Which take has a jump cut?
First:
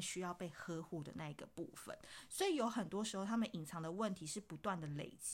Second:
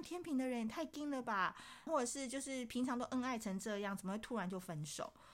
second; 1 cut; at 1.9 s

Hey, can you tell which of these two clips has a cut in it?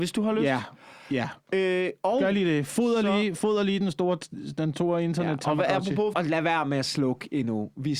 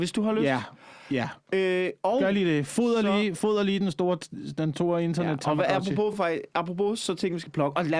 first; 1 cut; at 6.1 s

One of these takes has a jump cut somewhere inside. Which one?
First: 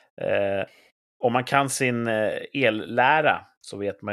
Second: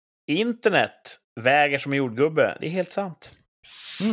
second; 1 cut; at 1.3 s

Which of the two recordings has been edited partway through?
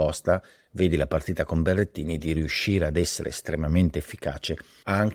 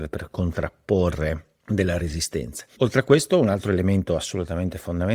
second; 1 cut; at 2.7 s

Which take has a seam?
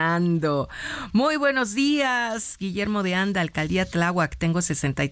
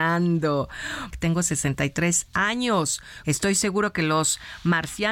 second; 2 cuts; at 1.1 s, 3.2 s

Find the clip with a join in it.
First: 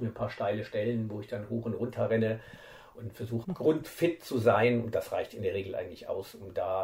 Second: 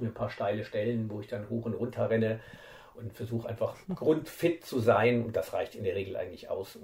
first; 1 cut; at 3.4 s

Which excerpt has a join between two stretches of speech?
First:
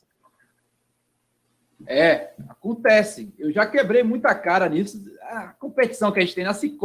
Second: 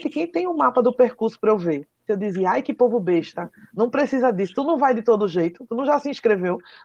second; 1 cut; at 2.1 s

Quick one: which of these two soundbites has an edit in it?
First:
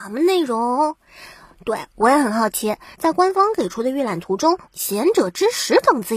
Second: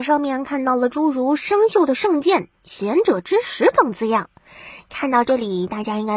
first; 2 cuts; at 2.9 s, 4.7 s

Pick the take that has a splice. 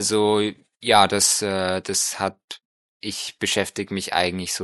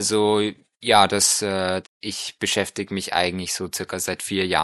second; 1 cut; at 1.8 s

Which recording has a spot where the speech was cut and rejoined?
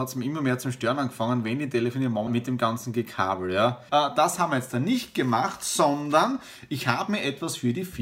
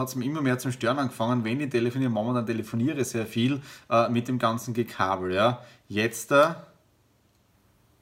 first; 2 cuts; at 2.3 s, 3.9 s

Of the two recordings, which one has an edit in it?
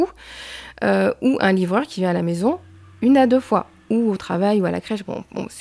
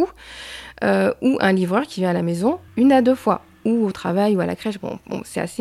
second; 1 cut; at 2.7 s

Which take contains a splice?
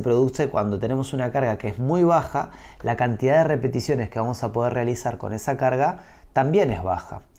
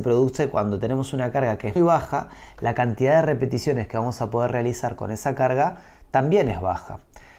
second; 1 cut; at 1.8 s

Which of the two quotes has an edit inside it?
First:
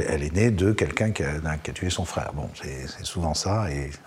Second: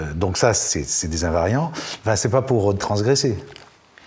second; 1 cut; at 2.0 s

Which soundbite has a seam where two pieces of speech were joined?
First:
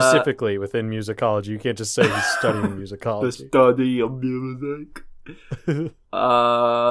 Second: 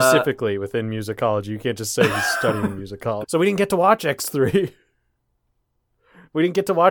second; 1 cut; at 3.2 s

